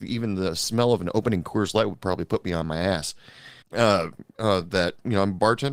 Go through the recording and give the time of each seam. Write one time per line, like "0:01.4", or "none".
0:03.6